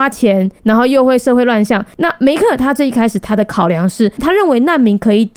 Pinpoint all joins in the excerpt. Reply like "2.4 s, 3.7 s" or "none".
none